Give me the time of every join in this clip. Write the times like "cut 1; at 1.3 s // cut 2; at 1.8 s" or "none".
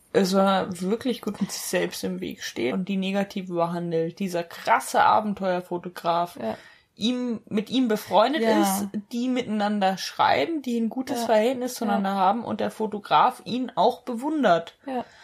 cut 1; at 1.4 s // cut 2; at 2.7 s